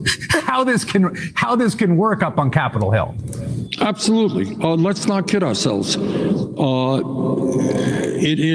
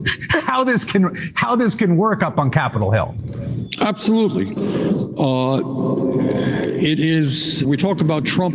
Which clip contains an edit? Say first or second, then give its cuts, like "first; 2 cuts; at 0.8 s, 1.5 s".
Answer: second; 2 cuts; at 4.6 s, 7.6 s